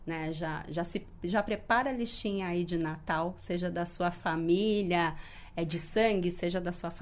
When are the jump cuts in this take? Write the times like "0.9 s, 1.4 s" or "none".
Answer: none